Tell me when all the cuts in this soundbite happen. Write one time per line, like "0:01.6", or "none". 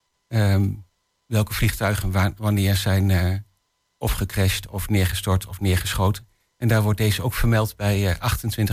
none